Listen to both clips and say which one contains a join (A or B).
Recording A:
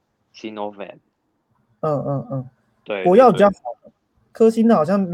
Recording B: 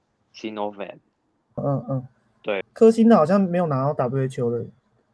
B